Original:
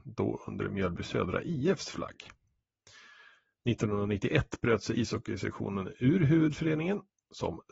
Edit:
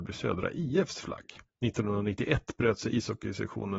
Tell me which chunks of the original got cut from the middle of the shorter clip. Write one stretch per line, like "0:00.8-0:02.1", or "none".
0:02.4-0:03.5